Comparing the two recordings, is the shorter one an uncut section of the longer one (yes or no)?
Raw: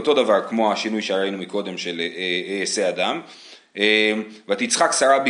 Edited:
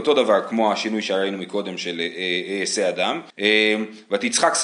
no